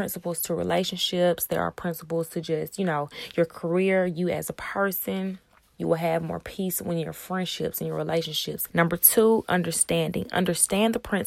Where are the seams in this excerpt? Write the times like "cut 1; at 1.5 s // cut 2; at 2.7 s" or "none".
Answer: cut 1; at 5.7 s // cut 2; at 8.7 s